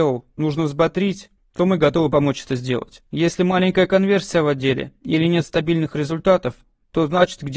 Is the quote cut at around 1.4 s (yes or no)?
yes